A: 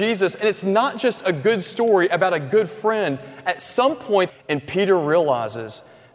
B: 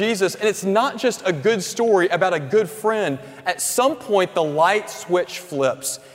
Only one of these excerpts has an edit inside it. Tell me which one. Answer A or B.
A